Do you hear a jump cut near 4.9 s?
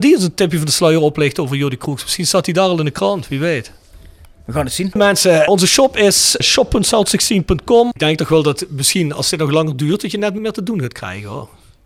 yes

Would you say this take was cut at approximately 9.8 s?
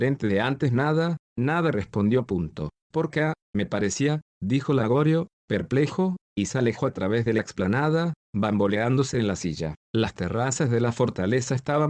yes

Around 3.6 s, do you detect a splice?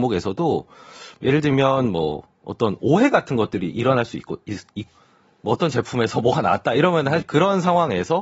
no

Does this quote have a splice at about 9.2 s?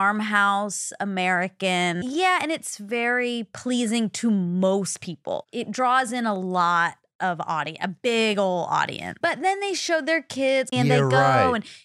yes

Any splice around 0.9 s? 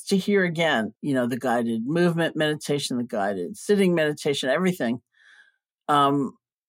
yes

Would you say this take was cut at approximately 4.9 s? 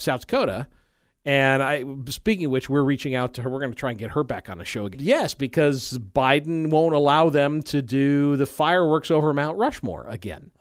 yes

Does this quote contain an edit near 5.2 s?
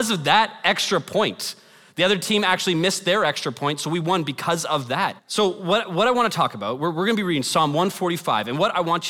yes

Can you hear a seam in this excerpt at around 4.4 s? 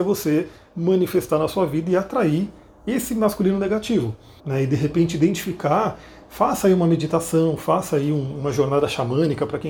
yes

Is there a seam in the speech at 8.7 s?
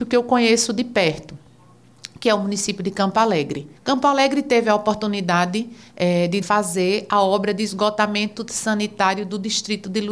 no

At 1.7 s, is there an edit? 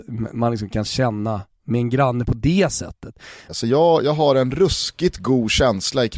no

